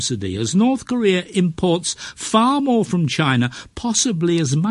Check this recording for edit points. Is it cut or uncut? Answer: uncut